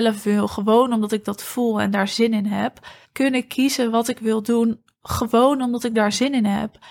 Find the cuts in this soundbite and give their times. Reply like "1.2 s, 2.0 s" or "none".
3.0 s